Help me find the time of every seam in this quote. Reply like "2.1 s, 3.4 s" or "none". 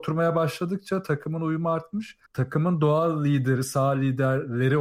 2.3 s